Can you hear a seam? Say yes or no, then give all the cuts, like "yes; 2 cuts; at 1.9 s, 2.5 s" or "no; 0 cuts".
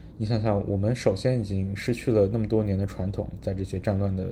no; 0 cuts